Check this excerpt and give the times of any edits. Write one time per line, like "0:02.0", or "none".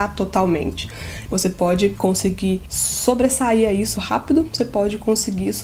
0:01.3
0:04.0